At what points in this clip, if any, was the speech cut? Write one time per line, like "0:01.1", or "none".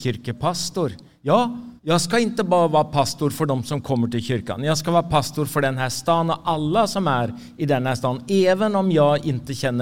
0:01.8